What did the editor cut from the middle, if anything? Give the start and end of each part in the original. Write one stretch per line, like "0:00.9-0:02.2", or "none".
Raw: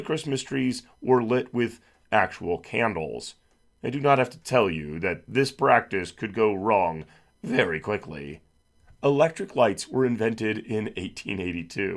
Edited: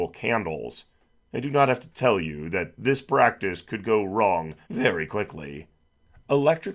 0:07.1-0:07.4